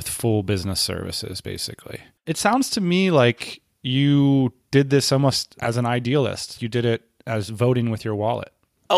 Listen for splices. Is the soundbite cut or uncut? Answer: cut